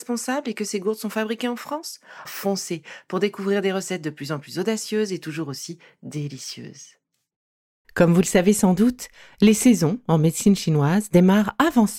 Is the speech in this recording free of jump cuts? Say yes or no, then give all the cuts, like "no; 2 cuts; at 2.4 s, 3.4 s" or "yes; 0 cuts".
no; 2 cuts; at 2.3 s, 7.8 s